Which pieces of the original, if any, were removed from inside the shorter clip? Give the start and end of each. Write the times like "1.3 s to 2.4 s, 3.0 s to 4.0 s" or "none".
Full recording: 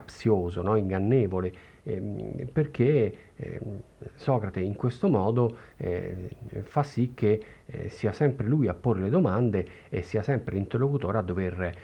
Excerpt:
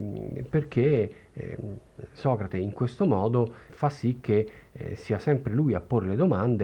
5.7 s to 6.6 s